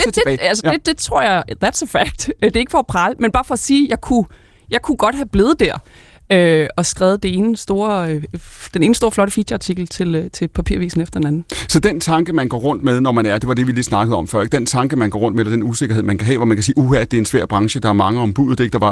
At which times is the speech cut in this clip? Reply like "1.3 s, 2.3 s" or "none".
6.8 s